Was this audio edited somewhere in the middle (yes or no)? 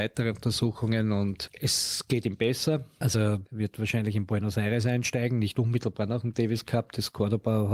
no